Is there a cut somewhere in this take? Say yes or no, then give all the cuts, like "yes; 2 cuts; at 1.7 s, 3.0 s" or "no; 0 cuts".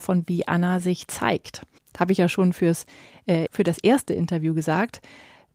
yes; 1 cut; at 3.5 s